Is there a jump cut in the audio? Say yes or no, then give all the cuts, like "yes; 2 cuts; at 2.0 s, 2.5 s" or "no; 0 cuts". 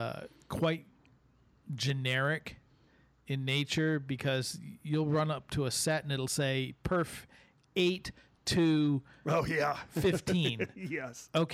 no; 0 cuts